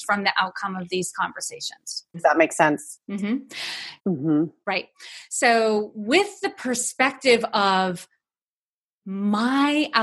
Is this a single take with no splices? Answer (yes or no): no